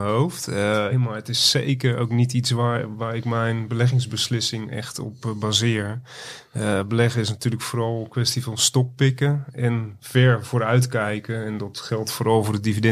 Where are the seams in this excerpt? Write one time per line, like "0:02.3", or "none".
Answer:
0:00.9